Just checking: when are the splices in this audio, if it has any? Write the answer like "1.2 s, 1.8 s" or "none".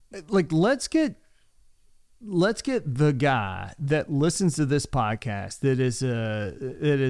none